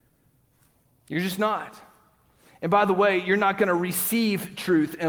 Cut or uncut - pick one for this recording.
uncut